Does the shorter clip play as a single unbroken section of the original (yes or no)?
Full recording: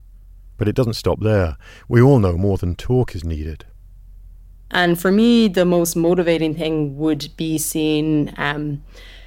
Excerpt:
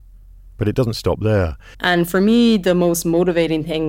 no